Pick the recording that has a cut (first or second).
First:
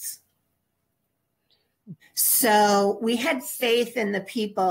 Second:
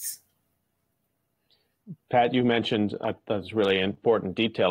first